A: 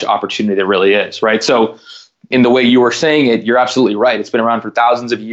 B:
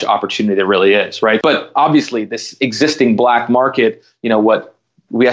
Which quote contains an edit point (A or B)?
B